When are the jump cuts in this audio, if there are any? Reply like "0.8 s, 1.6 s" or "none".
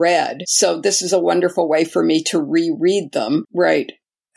3.4 s